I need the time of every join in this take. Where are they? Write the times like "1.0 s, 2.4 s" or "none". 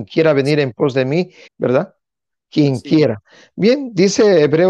1.5 s